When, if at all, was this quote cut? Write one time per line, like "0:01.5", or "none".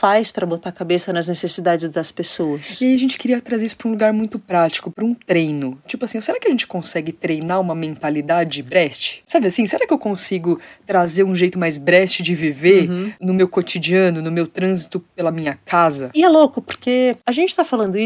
none